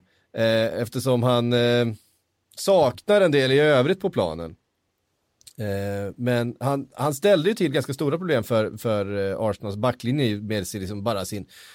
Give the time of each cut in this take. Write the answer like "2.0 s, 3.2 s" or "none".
none